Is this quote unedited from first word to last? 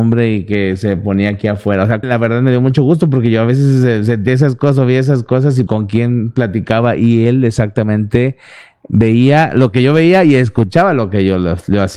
no; 2 cuts; at 2.0 s, 5.7 s

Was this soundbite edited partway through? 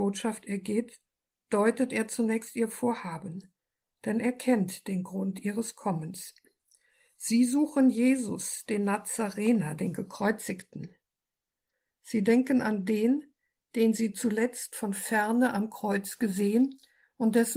no; 0 cuts

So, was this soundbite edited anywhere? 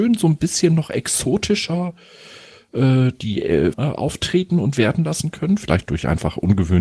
yes; 2 cuts; at 3.7 s, 5.9 s

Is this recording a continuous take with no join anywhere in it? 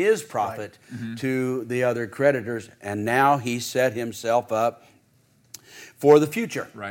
yes; 0 cuts

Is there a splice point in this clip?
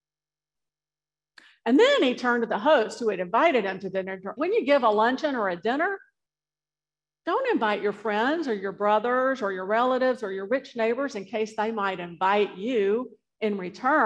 yes; 1 cut; at 4.4 s

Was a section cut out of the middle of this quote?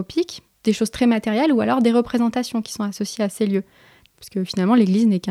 yes; 1 cut; at 4.1 s

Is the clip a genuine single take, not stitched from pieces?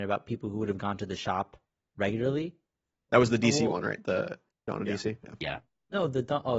no; 1 cut; at 3.1 s

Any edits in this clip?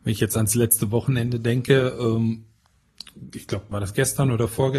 yes; 1 cut; at 3.7 s

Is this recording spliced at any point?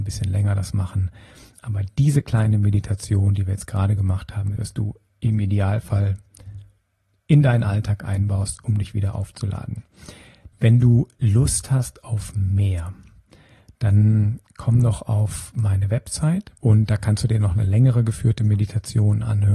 yes; 3 cuts; at 4.6 s, 10.5 s, 16.6 s

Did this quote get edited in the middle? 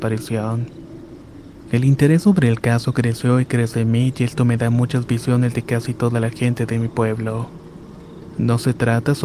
no; 0 cuts

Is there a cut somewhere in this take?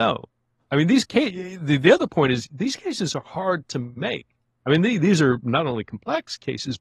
no; 0 cuts

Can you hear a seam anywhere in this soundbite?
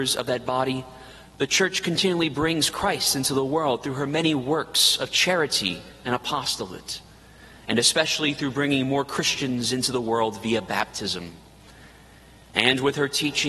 no; 0 cuts

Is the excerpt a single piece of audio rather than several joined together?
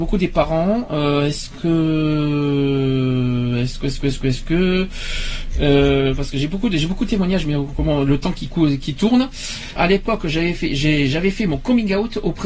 no; 1 cut; at 9.8 s

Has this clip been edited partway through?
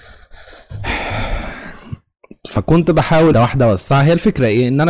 yes; 1 cut; at 3.3 s

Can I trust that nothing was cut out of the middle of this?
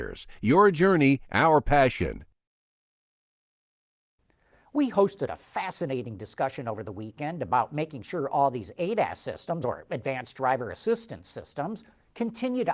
yes; 0 cuts

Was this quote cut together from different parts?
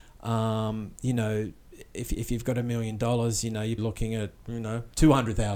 yes; 2 cuts; at 1.0 s, 3.8 s

